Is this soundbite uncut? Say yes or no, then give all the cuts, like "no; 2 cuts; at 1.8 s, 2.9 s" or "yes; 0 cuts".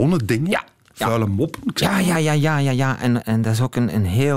no; 2 cuts; at 2.1 s, 3.2 s